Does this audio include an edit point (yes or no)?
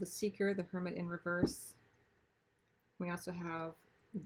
no